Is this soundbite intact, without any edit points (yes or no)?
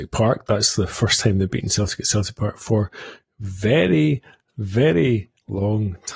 yes